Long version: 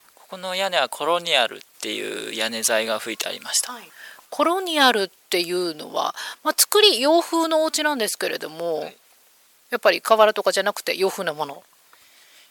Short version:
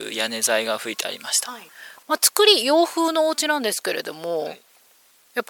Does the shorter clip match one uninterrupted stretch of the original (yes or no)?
no